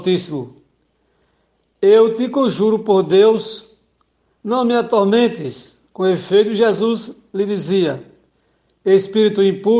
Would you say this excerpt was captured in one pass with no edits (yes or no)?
yes